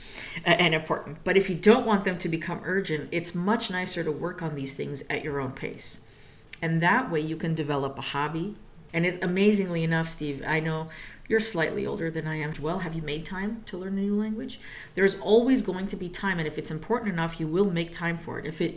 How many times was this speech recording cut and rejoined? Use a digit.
2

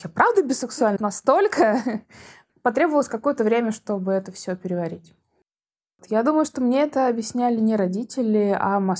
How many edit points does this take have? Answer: 1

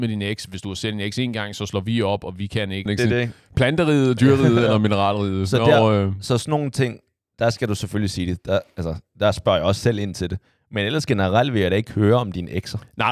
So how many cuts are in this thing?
1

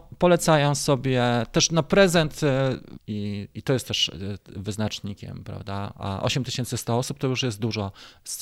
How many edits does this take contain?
1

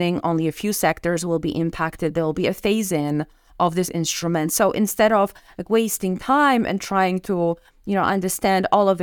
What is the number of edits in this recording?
0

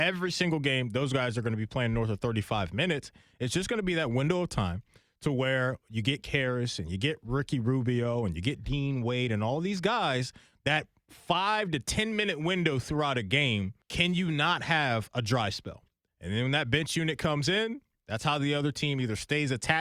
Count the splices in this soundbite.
2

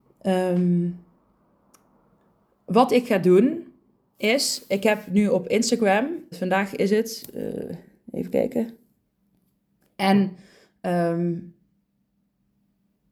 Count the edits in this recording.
2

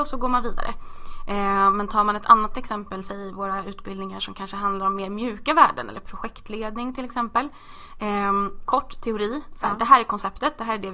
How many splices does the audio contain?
1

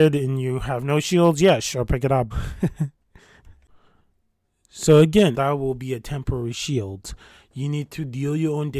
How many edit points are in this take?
2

